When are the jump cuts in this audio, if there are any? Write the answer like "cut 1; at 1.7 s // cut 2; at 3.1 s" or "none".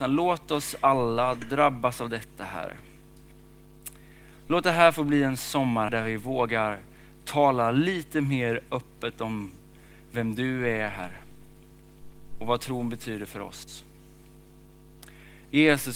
cut 1; at 5.9 s